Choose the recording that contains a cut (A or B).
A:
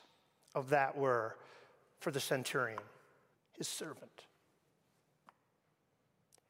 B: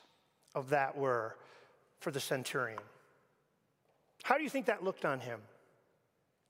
A